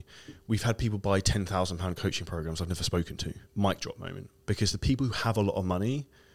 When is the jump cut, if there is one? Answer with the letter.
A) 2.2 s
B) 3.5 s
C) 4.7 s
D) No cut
B